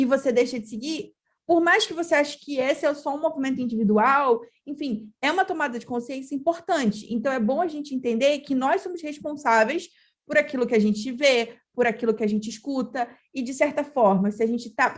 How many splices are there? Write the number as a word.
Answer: zero